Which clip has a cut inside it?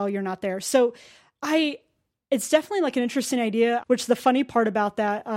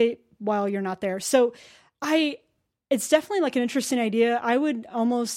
first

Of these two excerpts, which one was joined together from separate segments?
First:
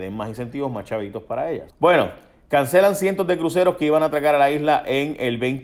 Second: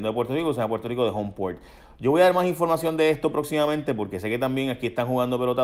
first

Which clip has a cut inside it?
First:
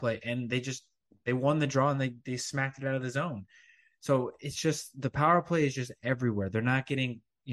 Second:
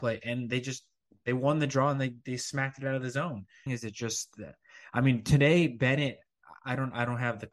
second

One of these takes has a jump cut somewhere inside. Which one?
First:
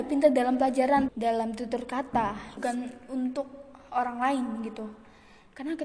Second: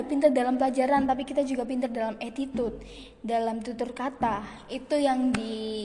first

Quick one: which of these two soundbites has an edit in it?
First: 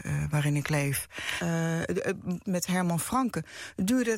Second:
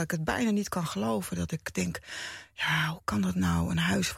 first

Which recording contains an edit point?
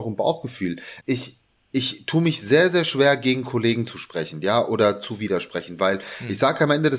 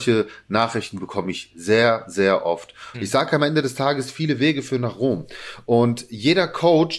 second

